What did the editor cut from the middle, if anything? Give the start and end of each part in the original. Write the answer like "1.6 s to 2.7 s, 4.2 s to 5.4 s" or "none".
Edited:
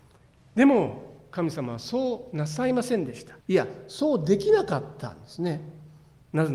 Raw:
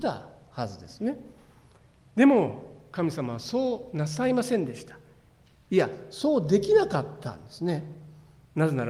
5.0 s to 5.6 s